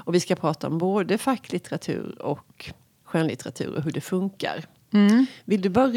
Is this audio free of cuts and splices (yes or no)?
yes